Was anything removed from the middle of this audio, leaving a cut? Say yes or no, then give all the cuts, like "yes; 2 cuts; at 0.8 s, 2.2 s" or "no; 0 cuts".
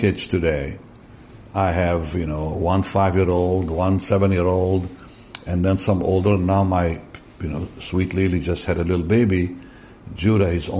no; 0 cuts